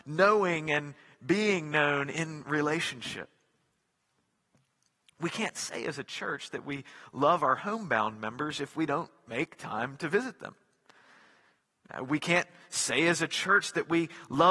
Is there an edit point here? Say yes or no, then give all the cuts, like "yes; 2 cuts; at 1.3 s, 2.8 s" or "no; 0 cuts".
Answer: no; 0 cuts